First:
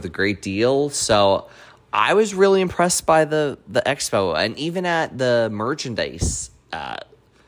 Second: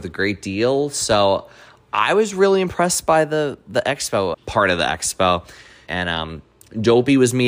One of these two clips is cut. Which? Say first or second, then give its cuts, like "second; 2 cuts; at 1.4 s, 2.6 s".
second; 2 cuts; at 4.3 s, 5.9 s